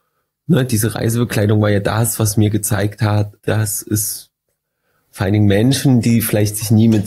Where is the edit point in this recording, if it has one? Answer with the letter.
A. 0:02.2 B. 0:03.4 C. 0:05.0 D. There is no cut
B